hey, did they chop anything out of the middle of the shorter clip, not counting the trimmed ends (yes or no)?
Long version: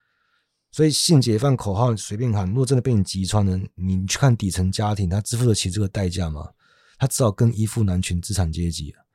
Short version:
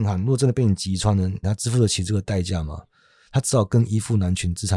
yes